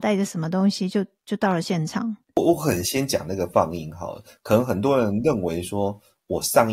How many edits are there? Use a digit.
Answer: 0